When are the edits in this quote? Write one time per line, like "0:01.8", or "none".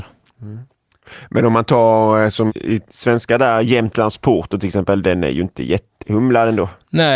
0:02.5